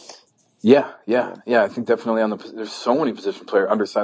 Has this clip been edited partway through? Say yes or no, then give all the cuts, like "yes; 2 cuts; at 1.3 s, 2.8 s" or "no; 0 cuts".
no; 0 cuts